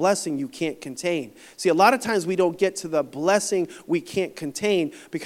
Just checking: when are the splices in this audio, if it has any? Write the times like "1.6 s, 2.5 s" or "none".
none